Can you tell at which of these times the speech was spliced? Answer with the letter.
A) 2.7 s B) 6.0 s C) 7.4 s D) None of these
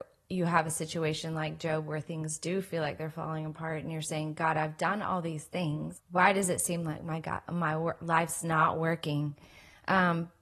B